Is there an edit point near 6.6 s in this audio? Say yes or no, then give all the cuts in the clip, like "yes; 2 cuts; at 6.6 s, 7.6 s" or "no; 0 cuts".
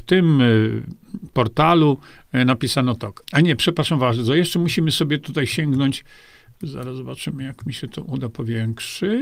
no; 1 cut; at 3.2 s